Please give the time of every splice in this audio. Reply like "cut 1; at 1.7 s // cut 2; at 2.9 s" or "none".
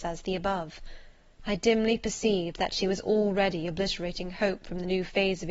cut 1; at 1.4 s